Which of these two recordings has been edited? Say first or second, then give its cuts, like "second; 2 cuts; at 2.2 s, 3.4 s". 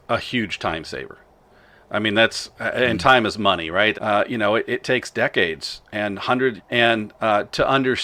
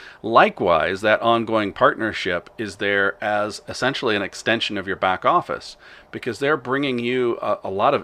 first; 2 cuts; at 3.9 s, 6.6 s